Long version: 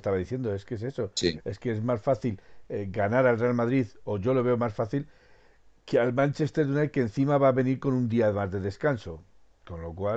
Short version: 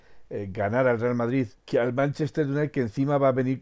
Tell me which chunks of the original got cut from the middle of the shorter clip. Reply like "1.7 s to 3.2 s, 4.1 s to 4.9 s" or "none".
3.9 s to 5.7 s